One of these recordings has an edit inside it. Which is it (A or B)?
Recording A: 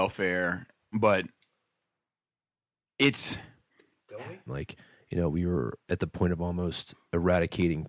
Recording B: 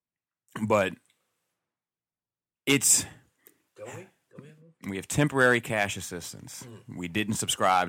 A